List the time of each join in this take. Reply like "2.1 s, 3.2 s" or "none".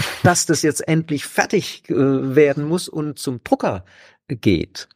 none